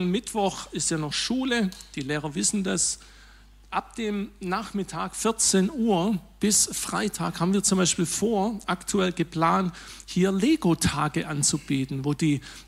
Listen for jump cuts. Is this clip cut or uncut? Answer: uncut